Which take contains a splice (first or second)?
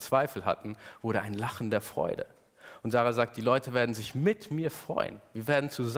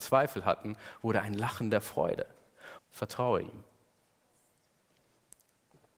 second